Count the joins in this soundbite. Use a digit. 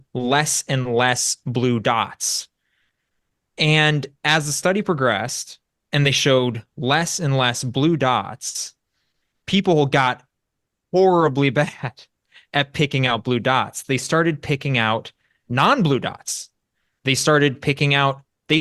0